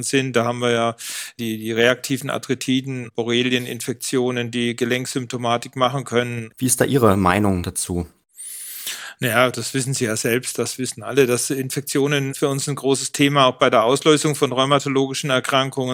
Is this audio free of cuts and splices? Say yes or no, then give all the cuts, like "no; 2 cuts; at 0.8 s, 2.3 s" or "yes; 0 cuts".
no; 1 cut; at 6.5 s